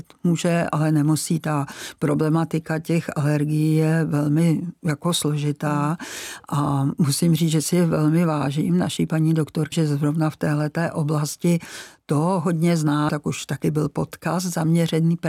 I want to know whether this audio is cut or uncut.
cut